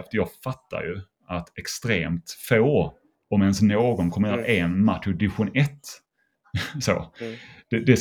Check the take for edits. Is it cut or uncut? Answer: uncut